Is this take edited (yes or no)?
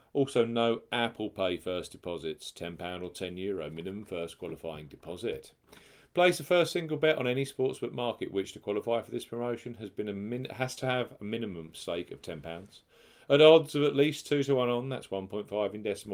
no